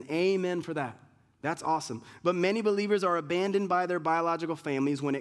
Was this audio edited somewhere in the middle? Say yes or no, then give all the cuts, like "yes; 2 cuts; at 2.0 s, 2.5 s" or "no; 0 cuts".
no; 0 cuts